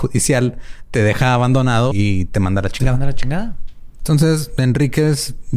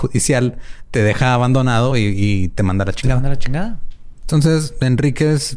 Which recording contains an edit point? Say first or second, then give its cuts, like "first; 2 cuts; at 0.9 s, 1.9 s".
first; 1 cut; at 1.9 s